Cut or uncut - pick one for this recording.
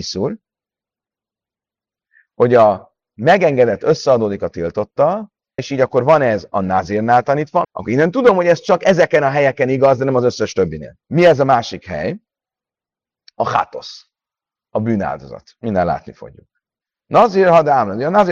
cut